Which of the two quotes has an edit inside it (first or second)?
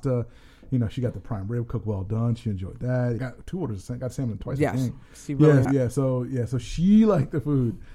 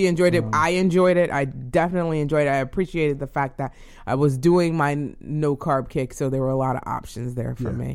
first